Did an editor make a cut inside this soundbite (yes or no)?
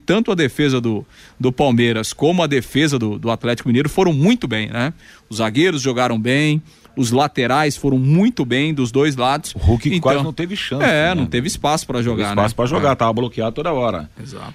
no